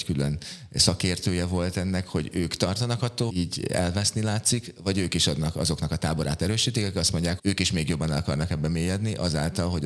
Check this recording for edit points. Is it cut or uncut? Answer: cut